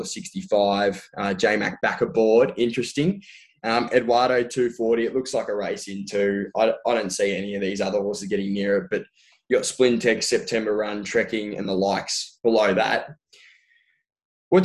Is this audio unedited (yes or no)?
yes